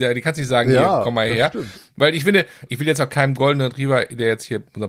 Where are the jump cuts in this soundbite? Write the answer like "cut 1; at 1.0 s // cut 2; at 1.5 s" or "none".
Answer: cut 1; at 2.7 s